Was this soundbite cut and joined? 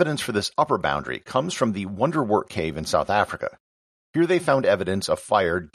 no; 0 cuts

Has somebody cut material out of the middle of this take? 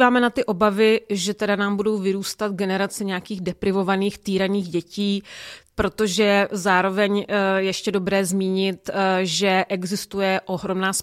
yes; 1 cut; at 5.7 s

